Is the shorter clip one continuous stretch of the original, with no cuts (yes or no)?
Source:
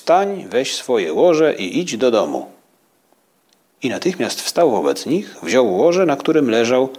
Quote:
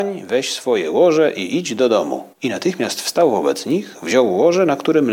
no